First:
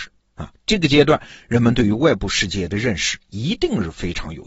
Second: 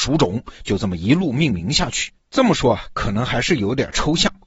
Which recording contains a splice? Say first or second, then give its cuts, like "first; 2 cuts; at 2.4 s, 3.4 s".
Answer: second; 1 cut; at 2.2 s